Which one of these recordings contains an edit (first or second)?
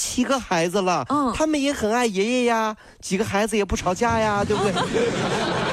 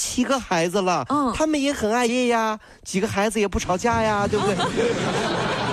second